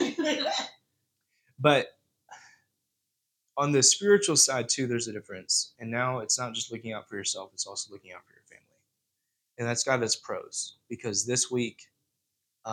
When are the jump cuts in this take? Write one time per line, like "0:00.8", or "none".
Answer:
none